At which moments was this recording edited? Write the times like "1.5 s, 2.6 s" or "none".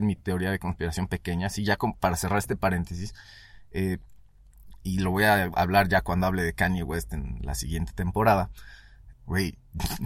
9.1 s